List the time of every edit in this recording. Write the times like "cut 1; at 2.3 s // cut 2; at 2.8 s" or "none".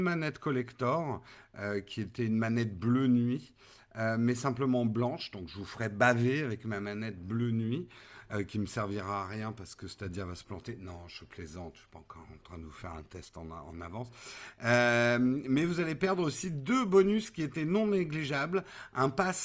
none

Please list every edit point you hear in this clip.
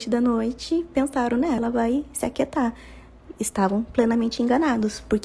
cut 1; at 1.6 s

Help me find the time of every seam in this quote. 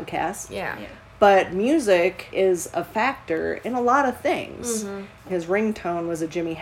cut 1; at 2.3 s // cut 2; at 5.3 s

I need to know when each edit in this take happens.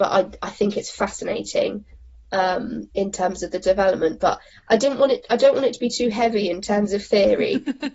none

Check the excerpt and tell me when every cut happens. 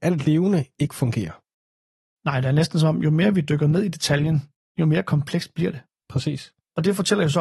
none

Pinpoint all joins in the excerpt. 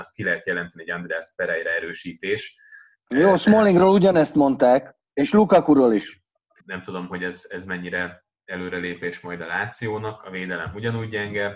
cut 1; at 5.1 s // cut 2; at 6.6 s

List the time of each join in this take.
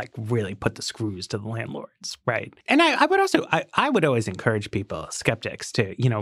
cut 1; at 2.6 s

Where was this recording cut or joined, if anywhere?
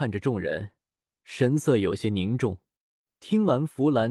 cut 1; at 3.1 s

